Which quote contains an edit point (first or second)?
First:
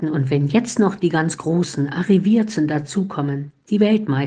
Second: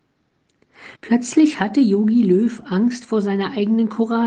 second